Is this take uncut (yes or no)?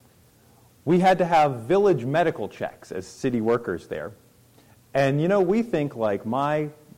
yes